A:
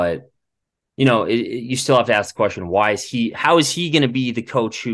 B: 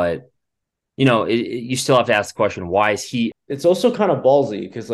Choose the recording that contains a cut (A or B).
B